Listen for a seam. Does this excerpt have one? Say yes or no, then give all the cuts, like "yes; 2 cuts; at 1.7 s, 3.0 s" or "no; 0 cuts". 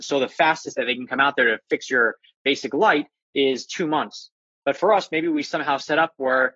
no; 0 cuts